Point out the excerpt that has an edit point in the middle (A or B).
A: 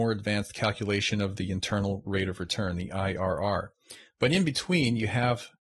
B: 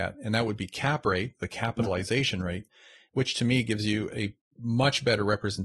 B